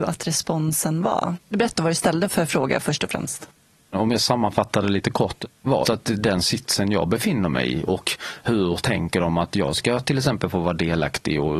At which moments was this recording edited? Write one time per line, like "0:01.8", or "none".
0:05.8